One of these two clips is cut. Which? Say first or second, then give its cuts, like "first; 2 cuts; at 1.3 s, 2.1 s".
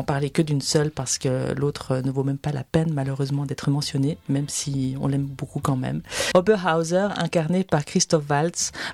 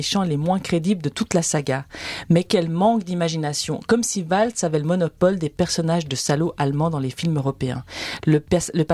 first; 1 cut; at 6.3 s